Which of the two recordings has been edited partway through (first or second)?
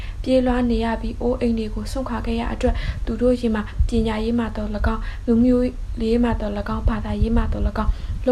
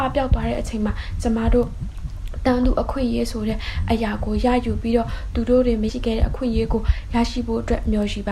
second